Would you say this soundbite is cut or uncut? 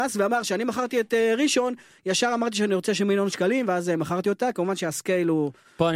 uncut